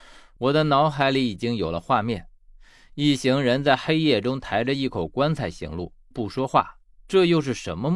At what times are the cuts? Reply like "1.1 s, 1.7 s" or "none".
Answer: 6.1 s

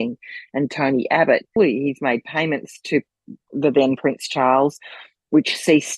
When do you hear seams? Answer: 1.6 s

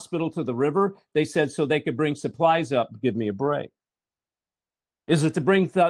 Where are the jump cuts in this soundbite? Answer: none

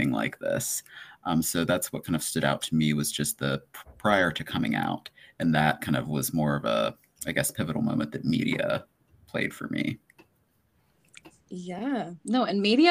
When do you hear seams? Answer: none

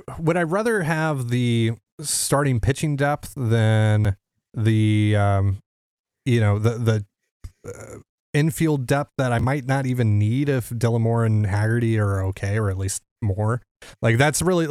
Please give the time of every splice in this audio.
none

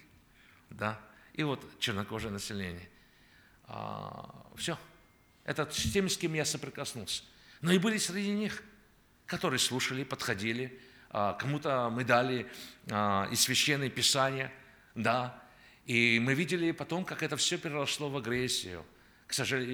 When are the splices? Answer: none

